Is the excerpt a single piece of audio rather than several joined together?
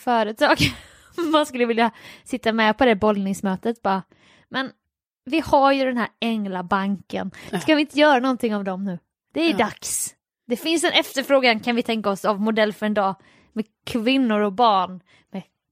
yes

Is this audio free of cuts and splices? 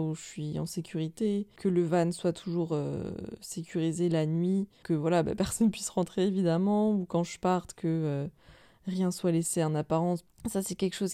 yes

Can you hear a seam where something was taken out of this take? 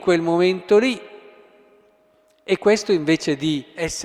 no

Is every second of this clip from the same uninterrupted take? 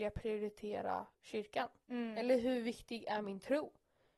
no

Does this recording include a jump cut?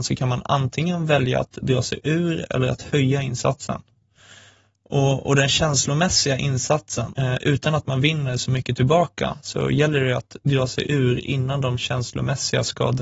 yes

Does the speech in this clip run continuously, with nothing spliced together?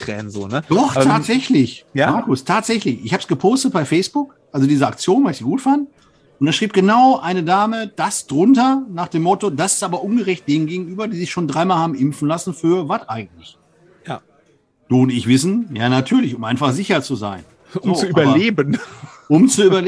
yes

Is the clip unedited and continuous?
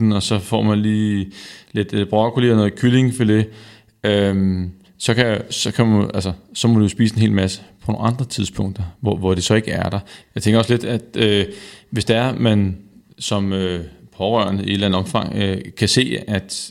no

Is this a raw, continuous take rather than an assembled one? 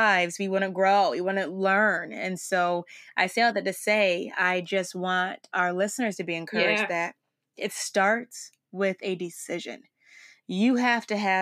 yes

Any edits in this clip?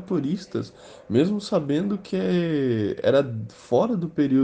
no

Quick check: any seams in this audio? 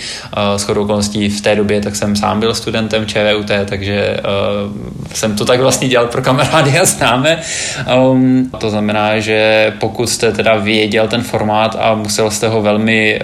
yes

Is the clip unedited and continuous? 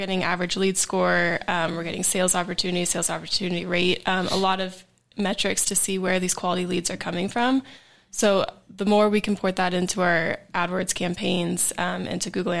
yes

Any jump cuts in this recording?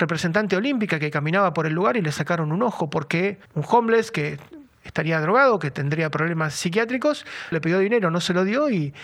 yes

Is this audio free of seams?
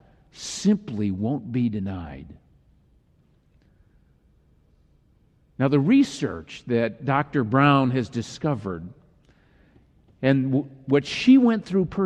yes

